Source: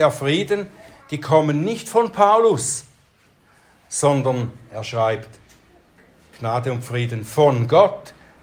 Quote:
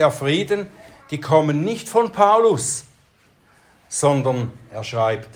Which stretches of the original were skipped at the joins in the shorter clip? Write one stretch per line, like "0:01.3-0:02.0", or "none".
none

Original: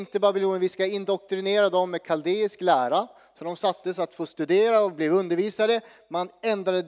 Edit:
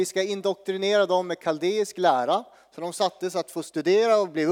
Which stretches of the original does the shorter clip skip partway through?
none

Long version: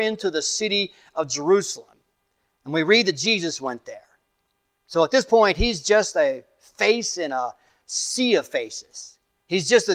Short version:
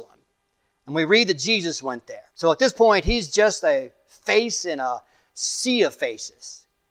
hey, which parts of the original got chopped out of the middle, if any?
0:04.1-0:04.8

